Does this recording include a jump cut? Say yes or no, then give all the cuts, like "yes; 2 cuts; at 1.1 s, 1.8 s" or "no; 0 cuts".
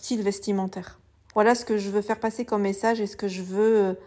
yes; 1 cut; at 1.3 s